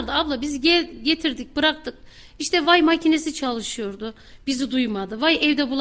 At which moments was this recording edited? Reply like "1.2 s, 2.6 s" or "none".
none

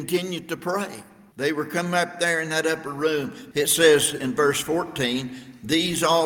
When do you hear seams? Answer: 1.3 s, 3.5 s

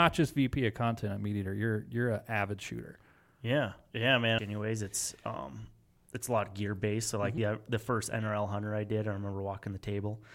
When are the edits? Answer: 4.4 s, 7.4 s

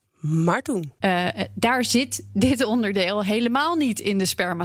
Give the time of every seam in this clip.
1.0 s

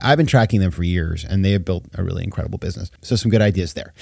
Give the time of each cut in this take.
3.0 s

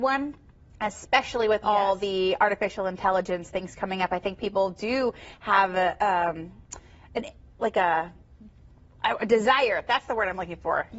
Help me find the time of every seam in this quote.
none

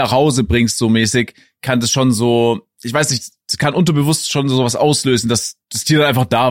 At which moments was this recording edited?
5.6 s

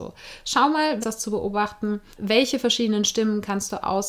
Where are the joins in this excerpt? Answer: 1.0 s, 2.1 s

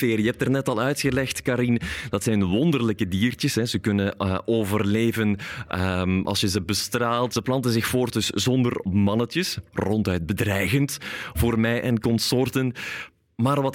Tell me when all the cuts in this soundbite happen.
7.3 s

